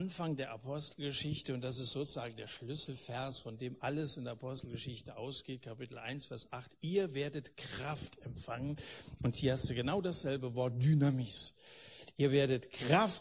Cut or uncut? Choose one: uncut